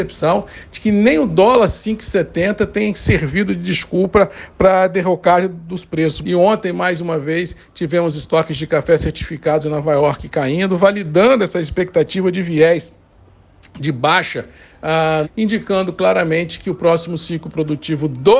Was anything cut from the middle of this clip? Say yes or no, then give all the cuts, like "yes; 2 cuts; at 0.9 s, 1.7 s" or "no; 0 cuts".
yes; 2 cuts; at 6.2 s, 15.2 s